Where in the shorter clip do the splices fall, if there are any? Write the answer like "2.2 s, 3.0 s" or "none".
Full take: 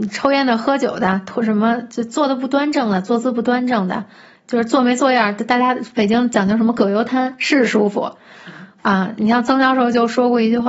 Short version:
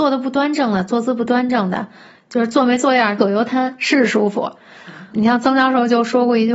3.2 s, 5.1 s